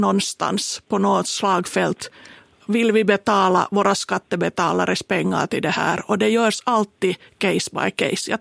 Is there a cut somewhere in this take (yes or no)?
no